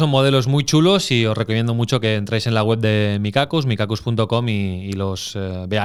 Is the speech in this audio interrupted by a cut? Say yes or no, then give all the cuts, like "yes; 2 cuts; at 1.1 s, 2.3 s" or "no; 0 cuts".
no; 0 cuts